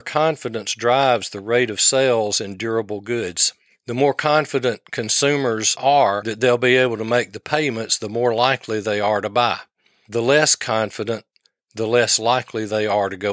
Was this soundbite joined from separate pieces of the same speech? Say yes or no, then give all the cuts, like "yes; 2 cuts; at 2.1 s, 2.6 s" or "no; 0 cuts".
no; 0 cuts